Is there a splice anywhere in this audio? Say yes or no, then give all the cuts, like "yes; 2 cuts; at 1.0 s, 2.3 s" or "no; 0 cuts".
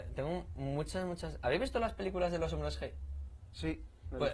no; 0 cuts